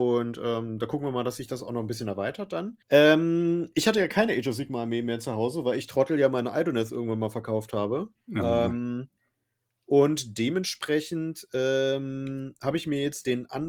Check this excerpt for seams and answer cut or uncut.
cut